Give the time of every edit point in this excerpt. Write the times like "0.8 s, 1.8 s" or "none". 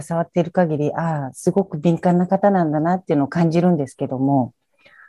none